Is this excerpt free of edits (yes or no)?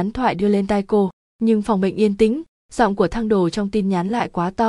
yes